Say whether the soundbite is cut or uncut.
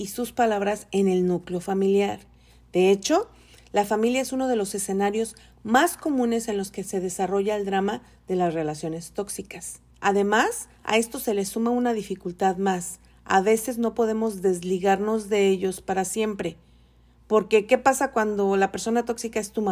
cut